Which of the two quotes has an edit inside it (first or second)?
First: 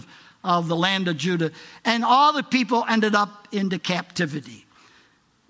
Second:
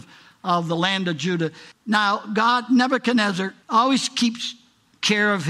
second